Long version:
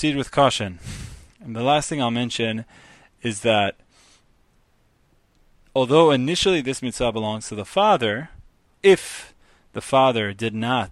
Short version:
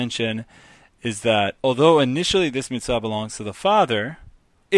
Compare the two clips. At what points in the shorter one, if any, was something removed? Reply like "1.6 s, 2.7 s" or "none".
1.6 s